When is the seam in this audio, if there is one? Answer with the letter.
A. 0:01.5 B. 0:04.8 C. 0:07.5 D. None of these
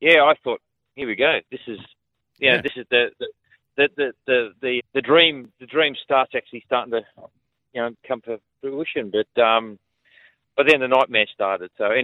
B